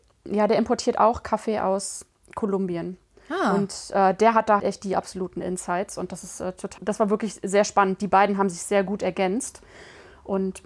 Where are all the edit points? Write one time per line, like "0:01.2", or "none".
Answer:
0:04.6
0:06.8